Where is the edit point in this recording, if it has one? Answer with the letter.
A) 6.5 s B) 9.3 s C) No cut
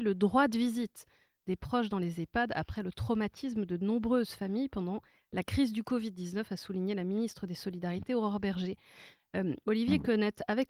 C